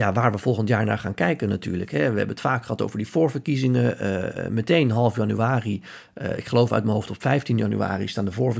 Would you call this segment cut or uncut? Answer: uncut